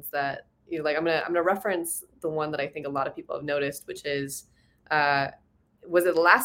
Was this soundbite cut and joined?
no; 0 cuts

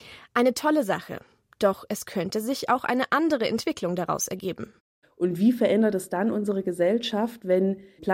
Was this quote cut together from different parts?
yes; 1 cut; at 5.0 s

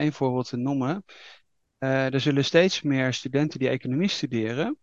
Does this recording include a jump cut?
no; 0 cuts

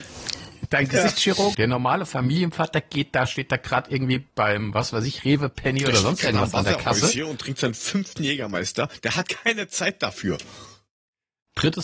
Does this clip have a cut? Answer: yes; 1 cut; at 1.5 s

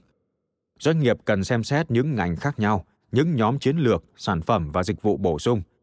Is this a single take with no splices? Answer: no; 1 cut; at 4.1 s

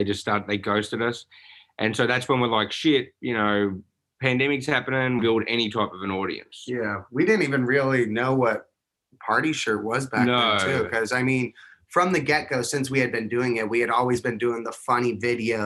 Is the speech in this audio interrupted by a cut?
yes; 1 cut; at 5.2 s

